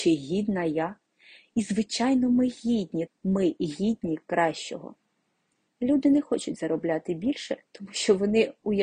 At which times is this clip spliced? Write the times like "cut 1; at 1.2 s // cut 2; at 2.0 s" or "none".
cut 1; at 3.1 s // cut 2; at 5.7 s